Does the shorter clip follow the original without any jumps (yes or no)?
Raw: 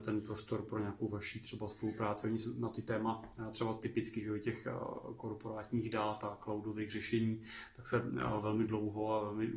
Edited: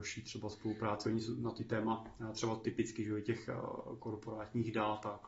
yes